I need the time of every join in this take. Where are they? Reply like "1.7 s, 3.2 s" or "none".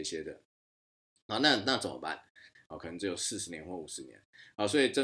2.5 s